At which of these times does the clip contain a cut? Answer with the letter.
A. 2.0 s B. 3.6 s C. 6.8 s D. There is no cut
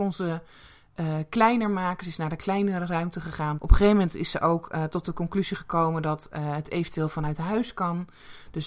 B